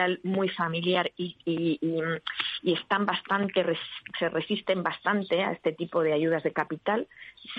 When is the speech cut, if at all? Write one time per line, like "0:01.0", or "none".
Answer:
none

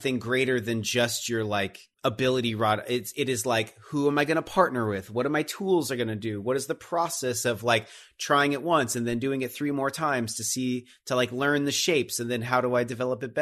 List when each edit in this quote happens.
0:01.9

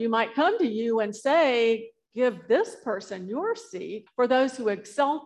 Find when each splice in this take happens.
0:04.1

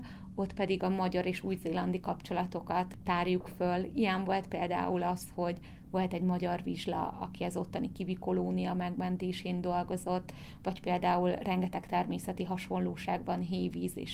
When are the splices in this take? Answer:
none

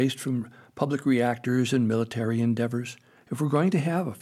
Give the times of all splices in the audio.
0:03.2

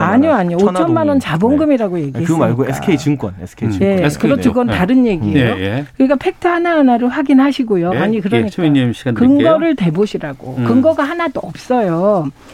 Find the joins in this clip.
0:07.9

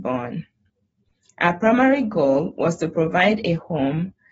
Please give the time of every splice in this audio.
none

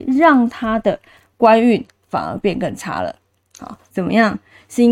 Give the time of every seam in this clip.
0:03.9

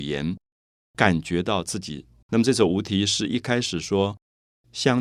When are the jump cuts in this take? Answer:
0:02.2

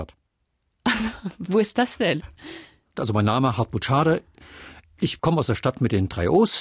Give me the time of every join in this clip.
0:02.9

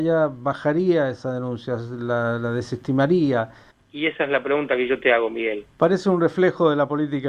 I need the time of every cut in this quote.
0:03.7
0:05.7

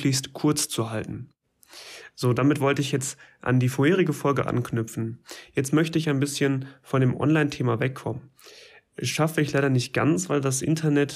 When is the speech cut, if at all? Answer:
none

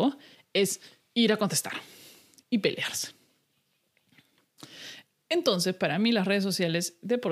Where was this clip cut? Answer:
none

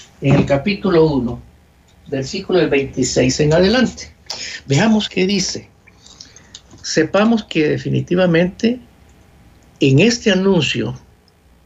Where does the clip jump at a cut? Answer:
0:05.1

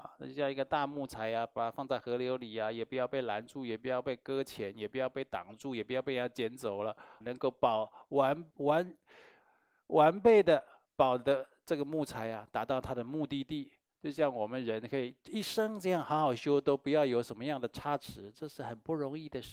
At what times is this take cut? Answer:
0:07.2

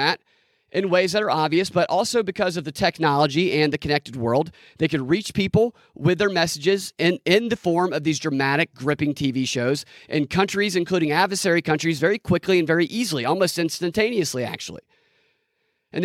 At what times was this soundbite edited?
none

